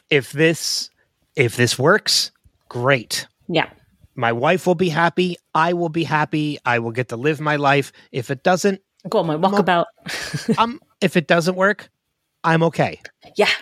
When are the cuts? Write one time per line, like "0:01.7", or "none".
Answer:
none